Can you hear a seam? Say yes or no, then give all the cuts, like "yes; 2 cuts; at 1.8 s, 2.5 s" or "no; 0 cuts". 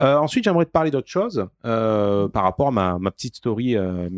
no; 0 cuts